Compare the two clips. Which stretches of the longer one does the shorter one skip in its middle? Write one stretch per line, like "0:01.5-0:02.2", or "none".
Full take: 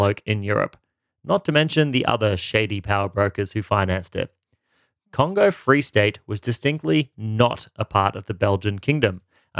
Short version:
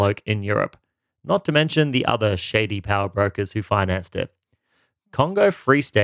none